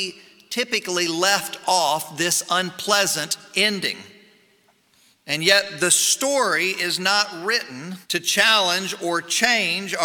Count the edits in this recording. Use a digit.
2